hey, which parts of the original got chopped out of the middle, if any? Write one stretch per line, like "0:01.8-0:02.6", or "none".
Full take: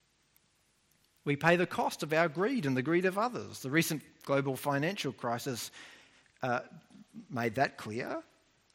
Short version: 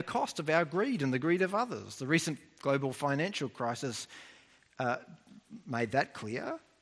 none